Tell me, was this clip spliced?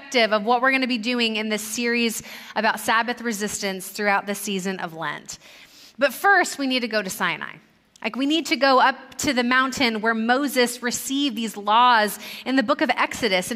no; 0 cuts

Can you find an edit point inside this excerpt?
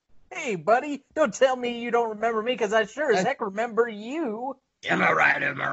no; 0 cuts

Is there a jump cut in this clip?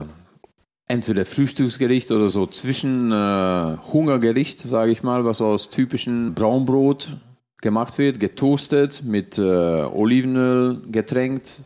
no; 0 cuts

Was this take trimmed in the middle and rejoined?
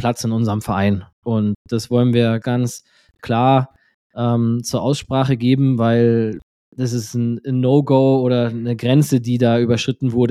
yes; 1 cut; at 2.4 s

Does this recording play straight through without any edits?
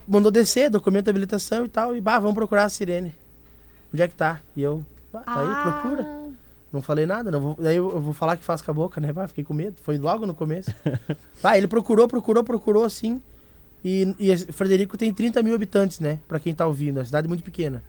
yes; 0 cuts

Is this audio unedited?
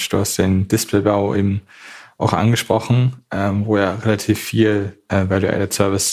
yes; 0 cuts

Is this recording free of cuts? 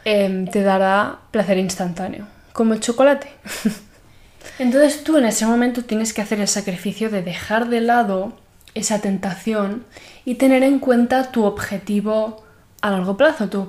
yes; 0 cuts

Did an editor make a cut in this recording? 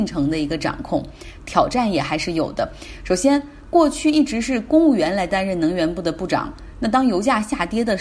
yes; 1 cut; at 1.4 s

